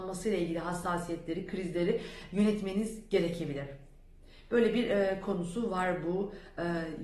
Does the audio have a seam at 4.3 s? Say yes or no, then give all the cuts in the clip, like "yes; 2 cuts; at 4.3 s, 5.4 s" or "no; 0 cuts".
no; 0 cuts